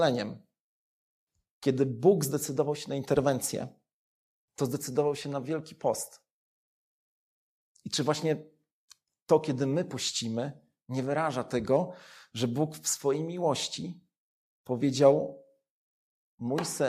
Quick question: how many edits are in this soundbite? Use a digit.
0